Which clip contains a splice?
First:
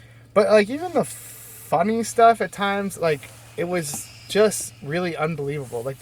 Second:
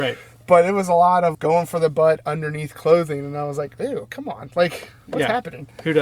second; 1 cut; at 1.3 s

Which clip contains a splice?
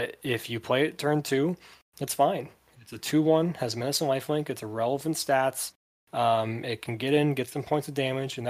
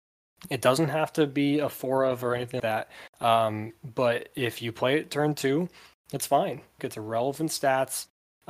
second; 2 cuts; at 2.6 s, 6.8 s

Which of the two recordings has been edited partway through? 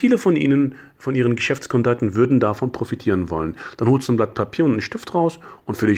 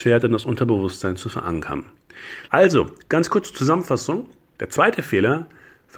second; 2 cuts; at 2.5 s, 4.6 s

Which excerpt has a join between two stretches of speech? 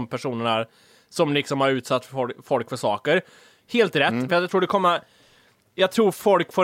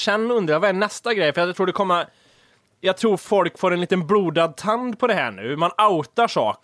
first; 1 cut; at 4.3 s

